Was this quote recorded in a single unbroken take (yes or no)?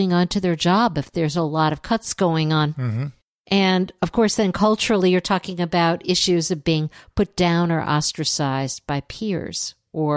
yes